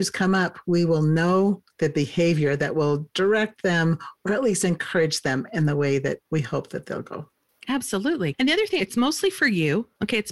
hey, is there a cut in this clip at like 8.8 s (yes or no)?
yes